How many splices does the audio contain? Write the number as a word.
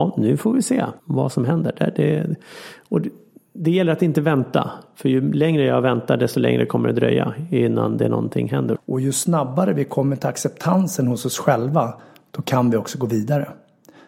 two